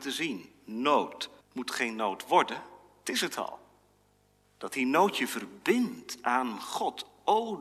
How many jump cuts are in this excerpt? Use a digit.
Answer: 2